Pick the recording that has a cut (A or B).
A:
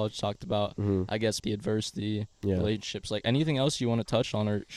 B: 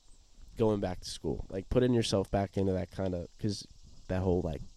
A